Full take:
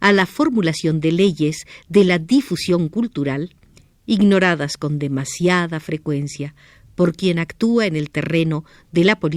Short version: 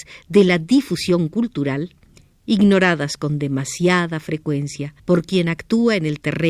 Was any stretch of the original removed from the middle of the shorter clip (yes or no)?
yes